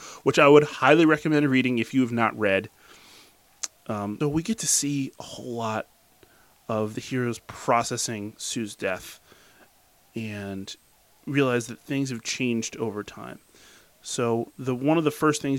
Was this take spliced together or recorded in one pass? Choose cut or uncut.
cut